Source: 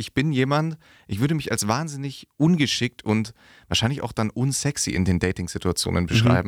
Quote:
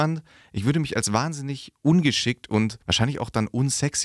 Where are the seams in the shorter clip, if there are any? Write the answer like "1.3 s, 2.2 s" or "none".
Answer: 2.8 s